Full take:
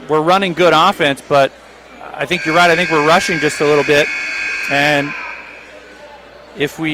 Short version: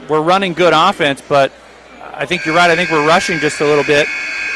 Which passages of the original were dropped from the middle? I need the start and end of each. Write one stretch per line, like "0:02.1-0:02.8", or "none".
none